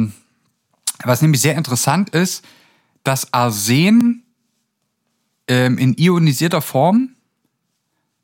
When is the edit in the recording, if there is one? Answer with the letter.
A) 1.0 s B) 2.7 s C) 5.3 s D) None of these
D